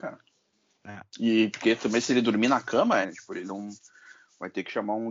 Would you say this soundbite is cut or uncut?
cut